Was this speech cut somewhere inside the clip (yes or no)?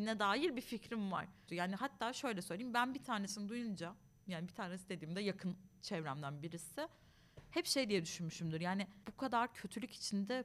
yes